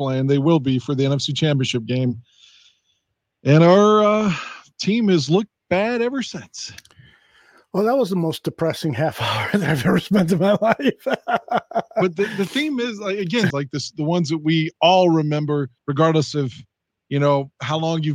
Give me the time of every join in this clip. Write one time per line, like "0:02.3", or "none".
0:13.5
0:15.8

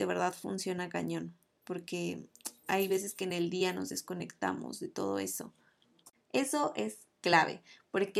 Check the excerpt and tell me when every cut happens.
0:06.1

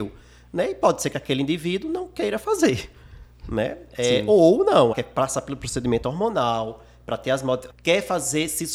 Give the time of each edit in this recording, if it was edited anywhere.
0:04.9
0:07.7

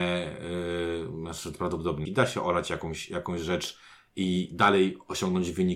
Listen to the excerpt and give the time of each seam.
0:02.1

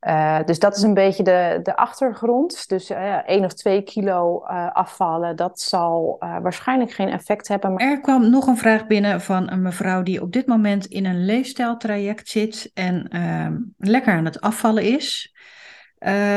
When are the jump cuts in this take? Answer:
0:07.8

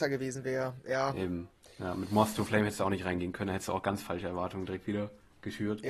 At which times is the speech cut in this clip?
none

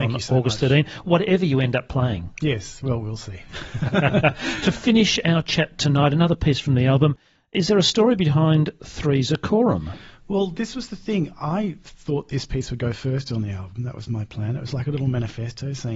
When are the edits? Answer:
none

